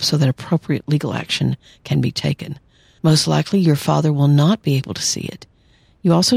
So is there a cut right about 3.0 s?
yes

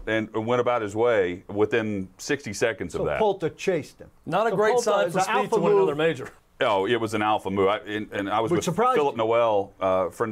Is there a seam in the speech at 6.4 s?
yes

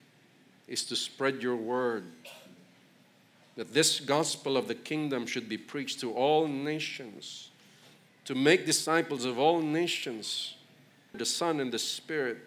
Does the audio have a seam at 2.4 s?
no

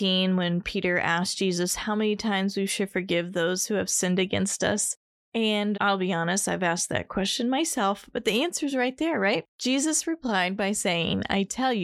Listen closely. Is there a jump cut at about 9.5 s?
yes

